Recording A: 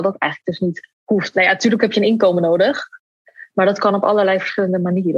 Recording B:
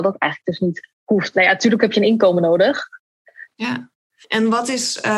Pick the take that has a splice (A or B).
B